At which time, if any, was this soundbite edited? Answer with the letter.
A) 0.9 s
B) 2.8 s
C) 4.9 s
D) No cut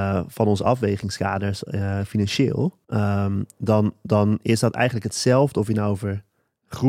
B